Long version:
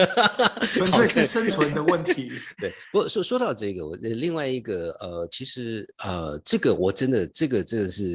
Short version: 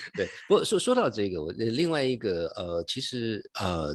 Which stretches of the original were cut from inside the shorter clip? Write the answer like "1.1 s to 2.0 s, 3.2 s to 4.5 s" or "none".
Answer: none